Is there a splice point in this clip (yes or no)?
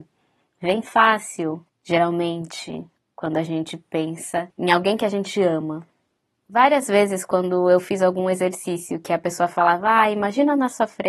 no